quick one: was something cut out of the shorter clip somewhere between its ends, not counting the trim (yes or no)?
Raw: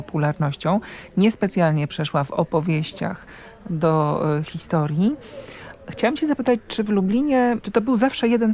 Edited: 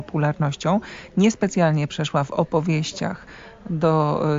no